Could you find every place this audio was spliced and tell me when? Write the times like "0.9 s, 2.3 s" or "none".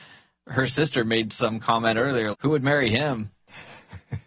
2.3 s